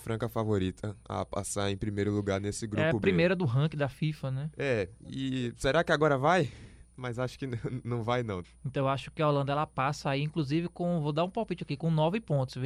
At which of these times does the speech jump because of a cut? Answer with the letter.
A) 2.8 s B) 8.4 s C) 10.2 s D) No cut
B